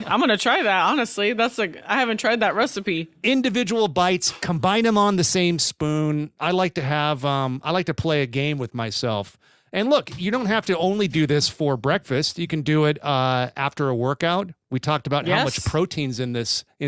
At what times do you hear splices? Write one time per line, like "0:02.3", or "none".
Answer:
none